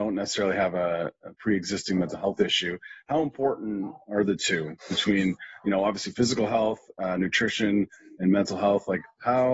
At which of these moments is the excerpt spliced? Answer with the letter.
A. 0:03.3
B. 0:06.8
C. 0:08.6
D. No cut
D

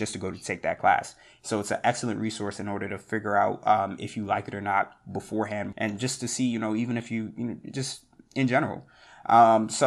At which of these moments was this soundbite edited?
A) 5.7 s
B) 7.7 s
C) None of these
A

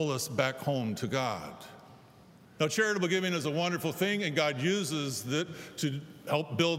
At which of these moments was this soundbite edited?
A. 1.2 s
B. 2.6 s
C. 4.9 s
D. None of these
B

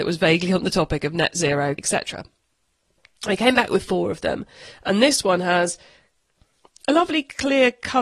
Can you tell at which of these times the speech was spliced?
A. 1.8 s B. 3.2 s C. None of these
A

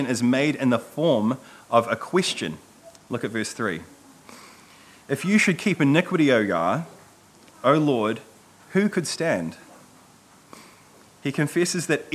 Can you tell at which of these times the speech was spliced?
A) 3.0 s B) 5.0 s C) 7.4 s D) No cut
D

